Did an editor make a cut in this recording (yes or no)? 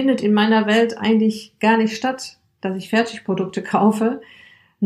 no